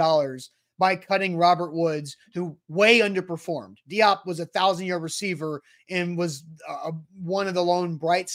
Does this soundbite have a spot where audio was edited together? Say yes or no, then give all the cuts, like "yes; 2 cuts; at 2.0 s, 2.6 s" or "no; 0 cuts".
no; 0 cuts